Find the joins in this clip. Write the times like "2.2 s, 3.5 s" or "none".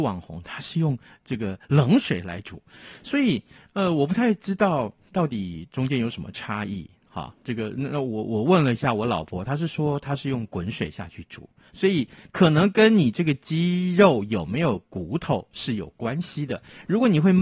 none